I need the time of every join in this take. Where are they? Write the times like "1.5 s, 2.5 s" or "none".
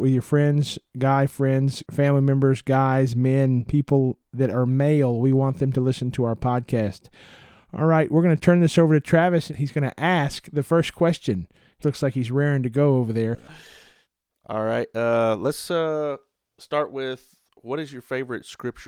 11.8 s

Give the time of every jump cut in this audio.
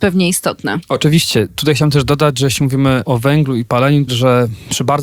4.1 s

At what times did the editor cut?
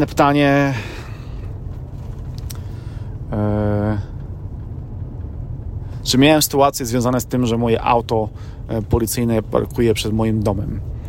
none

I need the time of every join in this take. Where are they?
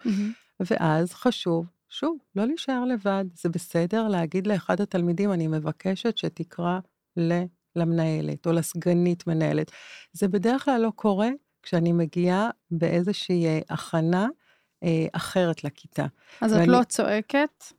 none

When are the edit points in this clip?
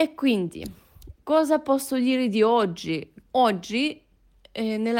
3.3 s

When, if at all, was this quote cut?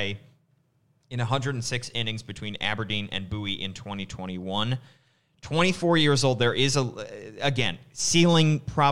none

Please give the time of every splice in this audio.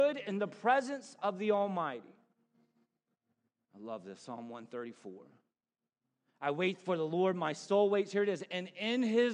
3.6 s

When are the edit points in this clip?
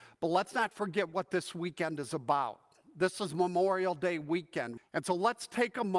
4.8 s

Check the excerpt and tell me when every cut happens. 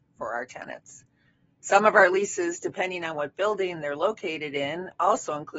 none

